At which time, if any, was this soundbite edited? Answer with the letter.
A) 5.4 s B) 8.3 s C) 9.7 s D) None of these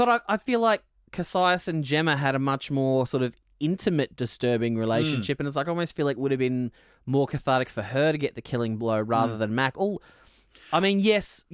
D